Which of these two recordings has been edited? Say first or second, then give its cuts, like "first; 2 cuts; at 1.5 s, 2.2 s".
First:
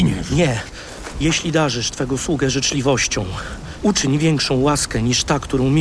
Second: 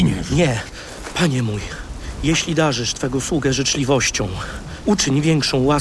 first; 1 cut; at 1.1 s